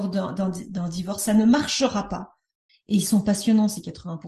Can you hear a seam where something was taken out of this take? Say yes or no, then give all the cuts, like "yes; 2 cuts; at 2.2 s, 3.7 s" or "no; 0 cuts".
yes; 1 cut; at 2.7 s